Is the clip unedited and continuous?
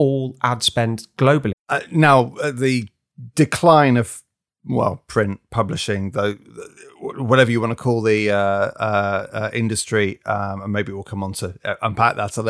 no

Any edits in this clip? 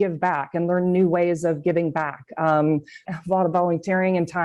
yes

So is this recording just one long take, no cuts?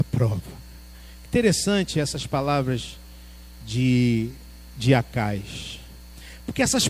yes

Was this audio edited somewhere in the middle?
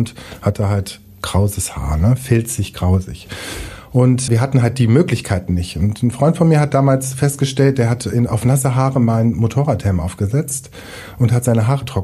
yes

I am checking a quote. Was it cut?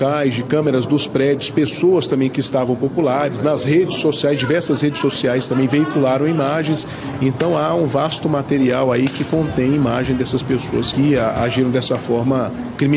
yes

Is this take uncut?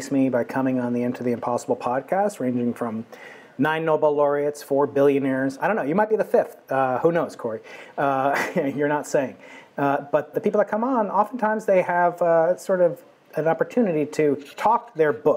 no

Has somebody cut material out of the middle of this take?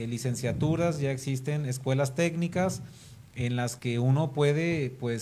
no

